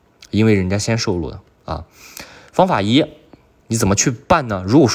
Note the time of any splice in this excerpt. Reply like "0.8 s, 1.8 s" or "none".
none

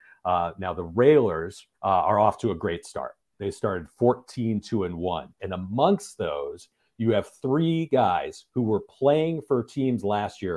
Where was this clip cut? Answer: 1.7 s, 5.4 s

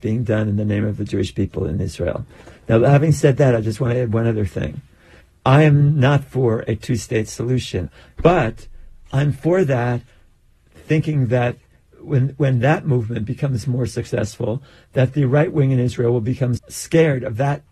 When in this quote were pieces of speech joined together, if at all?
8.1 s, 16.6 s

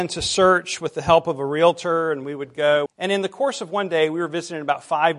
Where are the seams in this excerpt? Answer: 2.9 s

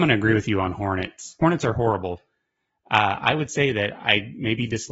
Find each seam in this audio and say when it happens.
none

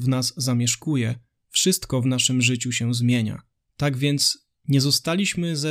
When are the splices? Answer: 3.6 s

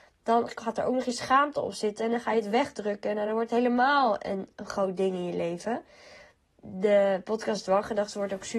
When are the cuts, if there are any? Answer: none

